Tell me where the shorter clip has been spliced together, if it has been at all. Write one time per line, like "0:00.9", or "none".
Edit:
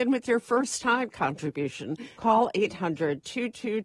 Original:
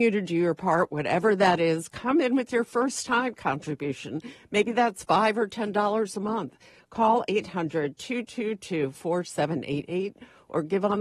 0:02.1